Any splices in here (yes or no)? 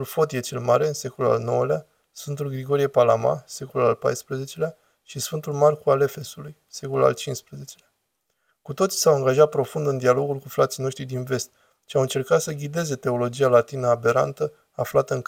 no